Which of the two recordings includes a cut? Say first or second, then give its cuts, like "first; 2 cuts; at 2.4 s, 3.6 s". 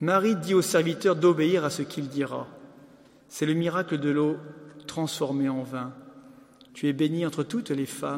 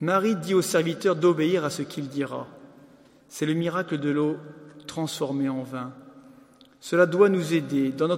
first; 1 cut; at 6.7 s